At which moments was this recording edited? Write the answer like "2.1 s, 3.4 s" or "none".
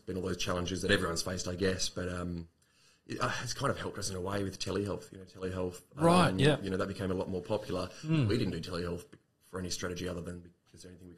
none